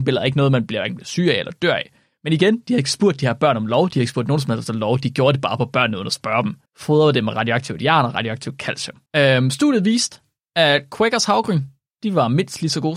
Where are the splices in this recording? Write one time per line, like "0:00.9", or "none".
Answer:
0:06.7
0:09.1